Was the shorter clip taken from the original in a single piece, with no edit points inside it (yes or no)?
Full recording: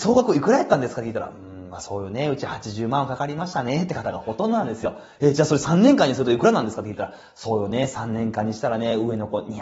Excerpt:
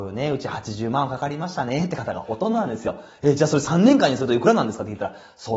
yes